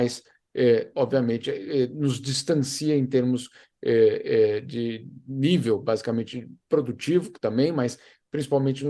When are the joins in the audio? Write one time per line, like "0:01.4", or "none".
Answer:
0:00.9